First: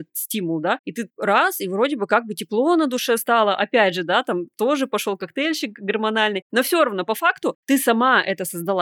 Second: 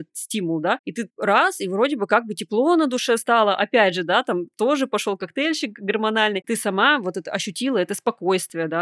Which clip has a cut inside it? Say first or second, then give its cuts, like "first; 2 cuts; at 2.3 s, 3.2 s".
second; 1 cut; at 6.4 s